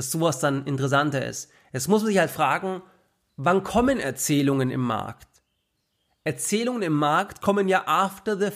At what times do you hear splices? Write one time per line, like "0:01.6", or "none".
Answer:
none